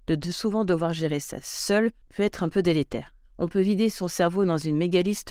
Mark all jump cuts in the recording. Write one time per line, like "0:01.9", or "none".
0:03.2